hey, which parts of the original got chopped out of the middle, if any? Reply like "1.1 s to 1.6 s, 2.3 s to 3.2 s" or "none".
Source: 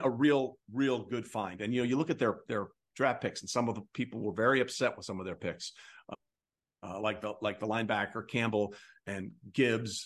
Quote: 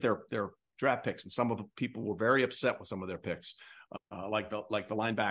6.2 s to 6.7 s